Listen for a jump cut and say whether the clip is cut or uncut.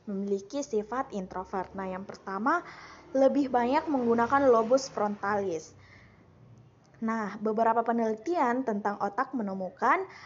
uncut